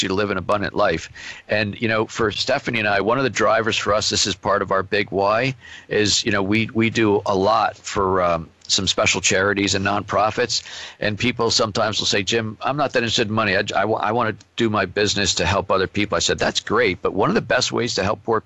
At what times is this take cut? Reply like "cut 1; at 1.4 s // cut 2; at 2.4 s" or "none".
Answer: none